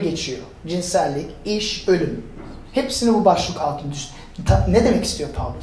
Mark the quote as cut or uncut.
uncut